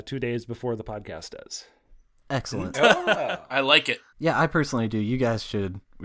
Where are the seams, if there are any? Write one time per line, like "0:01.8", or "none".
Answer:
0:02.7
0:04.1